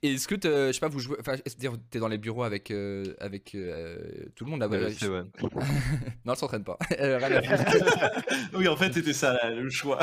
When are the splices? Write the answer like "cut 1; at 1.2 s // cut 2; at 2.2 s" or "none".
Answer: cut 1; at 5.3 s